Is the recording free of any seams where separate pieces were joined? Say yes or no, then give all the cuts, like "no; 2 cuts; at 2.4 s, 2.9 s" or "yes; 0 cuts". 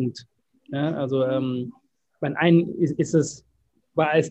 yes; 0 cuts